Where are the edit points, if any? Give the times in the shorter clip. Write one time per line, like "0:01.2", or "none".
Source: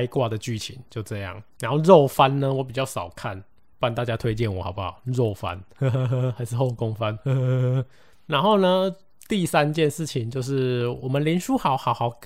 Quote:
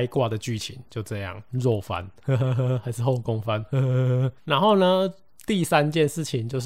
0:01.5
0:04.4